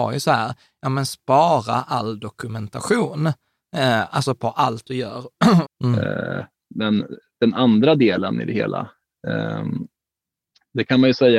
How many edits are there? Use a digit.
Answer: 1